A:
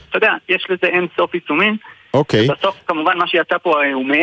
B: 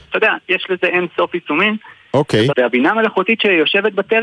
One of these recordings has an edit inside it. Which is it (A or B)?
B